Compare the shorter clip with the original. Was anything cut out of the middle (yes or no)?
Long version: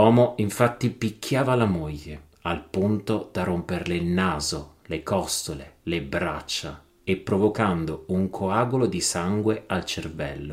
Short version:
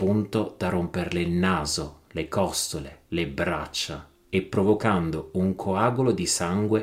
no